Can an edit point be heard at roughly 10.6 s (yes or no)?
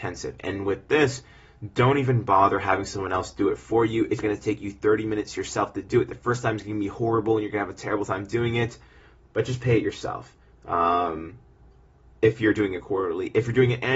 no